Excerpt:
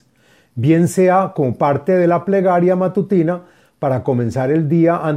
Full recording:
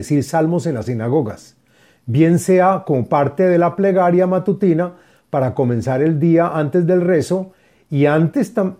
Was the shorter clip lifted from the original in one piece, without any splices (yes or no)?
yes